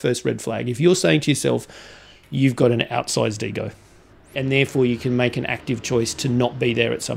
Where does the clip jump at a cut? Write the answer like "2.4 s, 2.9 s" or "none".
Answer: 2.2 s, 4.3 s